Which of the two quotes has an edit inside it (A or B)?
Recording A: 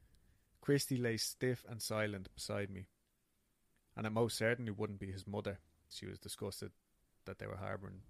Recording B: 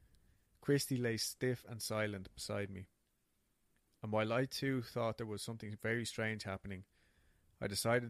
A